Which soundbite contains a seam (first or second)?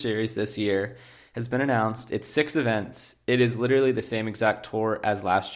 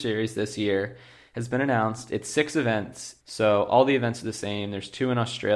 second